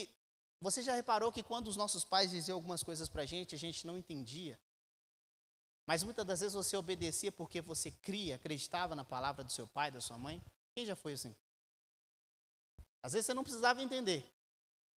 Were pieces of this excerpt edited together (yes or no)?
no